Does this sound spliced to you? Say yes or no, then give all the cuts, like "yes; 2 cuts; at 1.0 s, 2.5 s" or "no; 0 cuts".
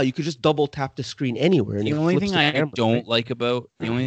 no; 0 cuts